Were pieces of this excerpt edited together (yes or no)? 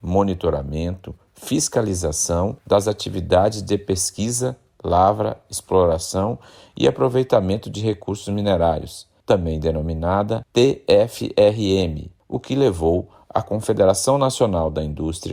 no